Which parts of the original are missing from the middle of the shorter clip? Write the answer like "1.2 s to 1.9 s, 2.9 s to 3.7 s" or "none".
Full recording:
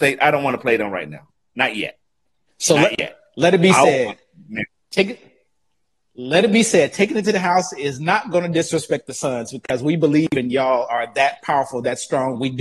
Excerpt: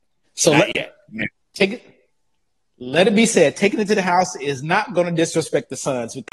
3.3 s to 4.4 s